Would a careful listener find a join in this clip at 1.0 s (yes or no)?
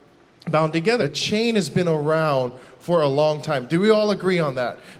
yes